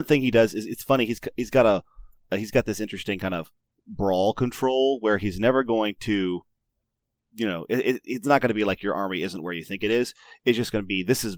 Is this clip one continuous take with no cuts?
yes; 0 cuts

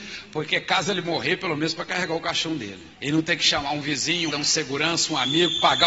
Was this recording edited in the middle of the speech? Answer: yes; 2 cuts; at 2.9 s, 4.3 s

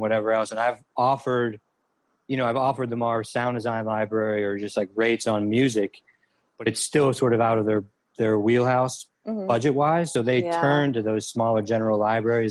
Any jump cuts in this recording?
no; 0 cuts

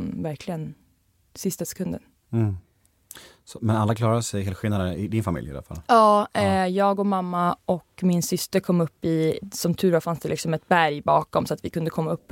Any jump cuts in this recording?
no; 0 cuts

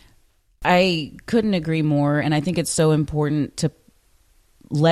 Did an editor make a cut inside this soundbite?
no; 0 cuts

